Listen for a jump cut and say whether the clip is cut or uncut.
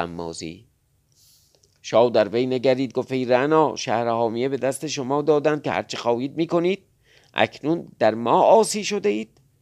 uncut